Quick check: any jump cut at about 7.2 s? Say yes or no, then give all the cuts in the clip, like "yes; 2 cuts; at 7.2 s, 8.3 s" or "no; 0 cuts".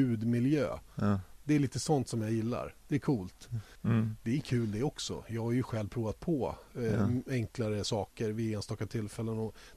no; 1 cut; at 3.7 s